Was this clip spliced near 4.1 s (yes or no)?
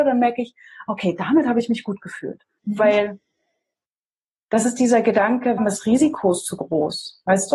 no